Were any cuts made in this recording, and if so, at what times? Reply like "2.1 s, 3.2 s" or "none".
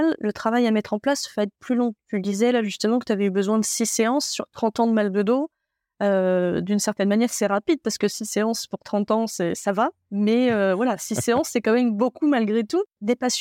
none